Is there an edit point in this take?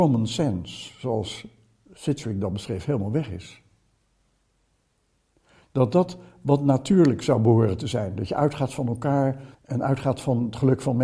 yes; 1 cut; at 9.5 s

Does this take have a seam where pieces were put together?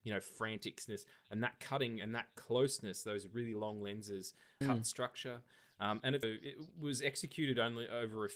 yes; 2 cuts; at 4.6 s, 6.2 s

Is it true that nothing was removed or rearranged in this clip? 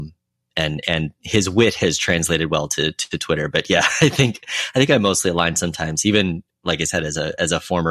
yes; 0 cuts

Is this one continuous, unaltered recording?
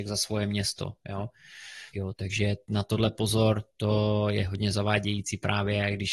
no; 1 cut; at 1.9 s

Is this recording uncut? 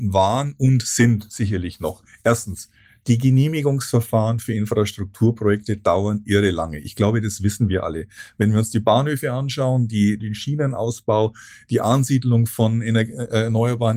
no; 1 cut; at 10.2 s

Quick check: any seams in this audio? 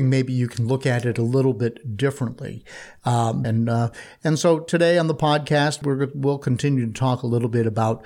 yes; 2 cuts; at 3.4 s, 5.8 s

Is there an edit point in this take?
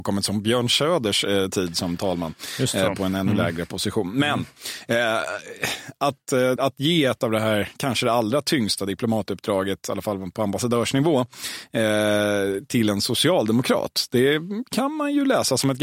yes; 1 cut; at 6.6 s

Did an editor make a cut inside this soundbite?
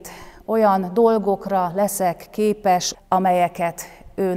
yes; 1 cut; at 2.9 s

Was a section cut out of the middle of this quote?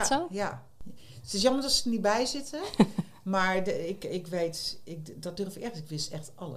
no; 0 cuts

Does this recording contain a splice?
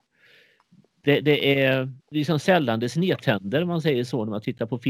yes; 1 cut; at 2.0 s

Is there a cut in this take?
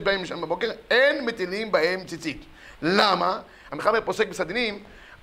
yes; 1 cut; at 3.7 s

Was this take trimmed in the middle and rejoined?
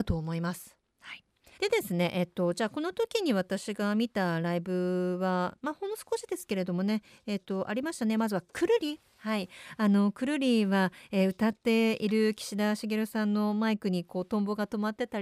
yes; 1 cut; at 1.6 s

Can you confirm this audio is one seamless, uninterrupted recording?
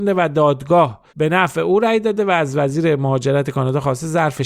no; 1 cut; at 1.1 s

